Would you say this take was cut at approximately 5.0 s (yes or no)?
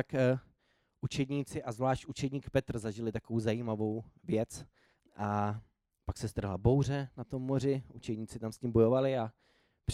yes